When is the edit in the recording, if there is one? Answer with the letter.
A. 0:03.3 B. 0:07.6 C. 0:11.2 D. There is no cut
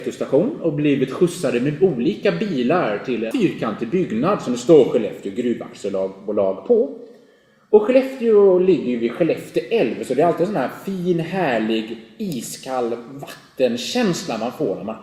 A